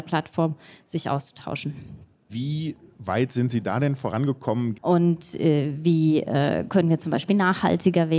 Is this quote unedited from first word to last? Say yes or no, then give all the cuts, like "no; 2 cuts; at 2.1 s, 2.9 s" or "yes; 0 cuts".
no; 2 cuts; at 2.3 s, 4.7 s